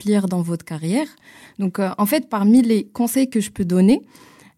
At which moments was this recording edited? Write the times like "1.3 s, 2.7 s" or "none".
1.5 s